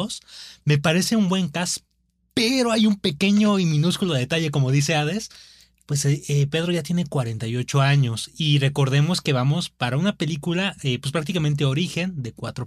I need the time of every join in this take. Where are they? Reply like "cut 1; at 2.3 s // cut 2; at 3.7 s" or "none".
none